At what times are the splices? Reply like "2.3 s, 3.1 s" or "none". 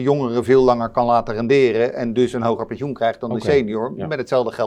none